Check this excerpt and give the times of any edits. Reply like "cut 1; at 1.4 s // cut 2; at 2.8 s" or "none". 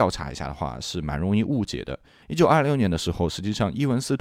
cut 1; at 2.2 s